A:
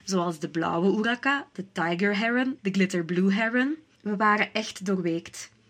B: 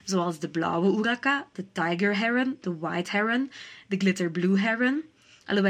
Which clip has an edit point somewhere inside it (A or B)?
A